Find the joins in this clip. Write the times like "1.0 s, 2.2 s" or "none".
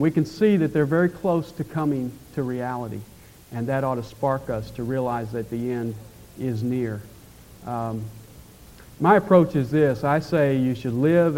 none